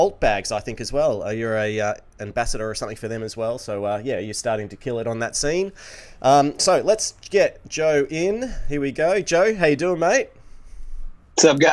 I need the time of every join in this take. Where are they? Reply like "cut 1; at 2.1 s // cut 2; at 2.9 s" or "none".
none